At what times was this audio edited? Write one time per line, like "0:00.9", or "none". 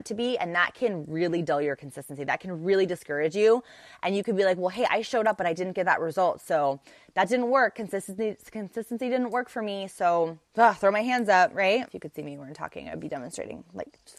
0:10.5
0:11.9